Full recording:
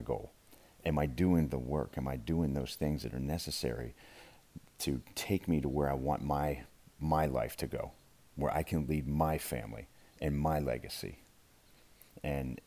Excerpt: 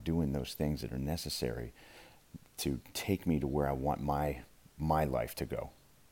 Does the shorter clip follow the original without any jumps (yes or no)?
yes